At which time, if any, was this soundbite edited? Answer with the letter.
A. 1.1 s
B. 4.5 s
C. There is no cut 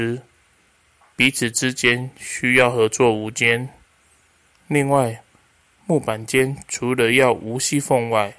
B